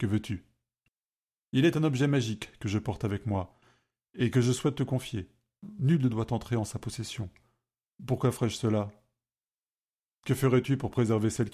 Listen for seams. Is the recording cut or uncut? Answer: cut